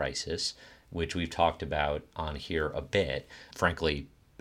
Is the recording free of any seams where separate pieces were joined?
no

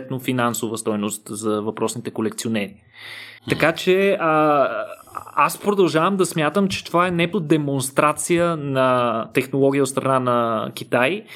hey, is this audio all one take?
no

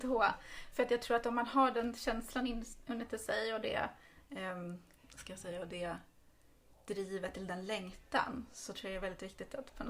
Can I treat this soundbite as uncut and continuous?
yes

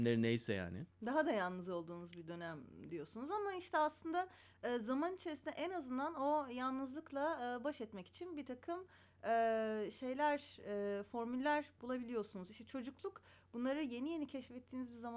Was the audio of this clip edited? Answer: no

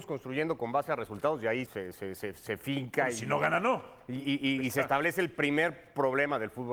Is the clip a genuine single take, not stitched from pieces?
no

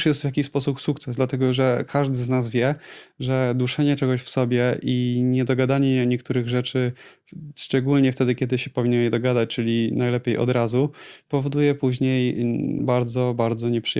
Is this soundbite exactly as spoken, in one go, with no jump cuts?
yes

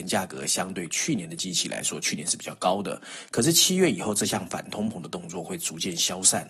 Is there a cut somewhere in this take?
no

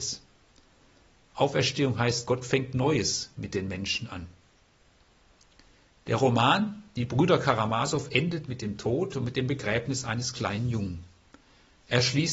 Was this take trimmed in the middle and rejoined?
no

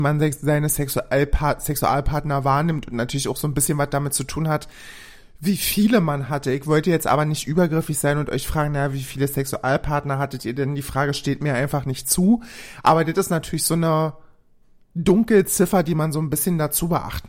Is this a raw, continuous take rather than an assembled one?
yes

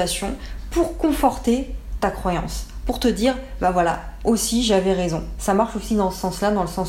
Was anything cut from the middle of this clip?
no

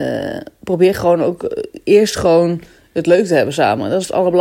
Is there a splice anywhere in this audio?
no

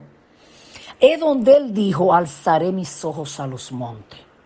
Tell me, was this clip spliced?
yes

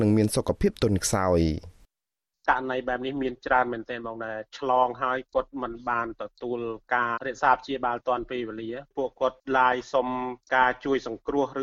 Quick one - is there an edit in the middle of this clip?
yes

